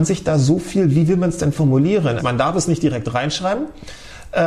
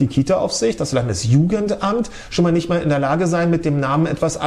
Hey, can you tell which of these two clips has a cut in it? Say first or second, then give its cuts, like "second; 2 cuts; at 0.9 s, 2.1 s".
first; 1 cut; at 2.2 s